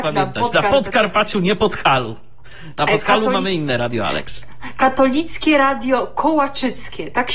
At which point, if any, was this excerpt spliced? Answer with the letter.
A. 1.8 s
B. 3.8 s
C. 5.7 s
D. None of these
B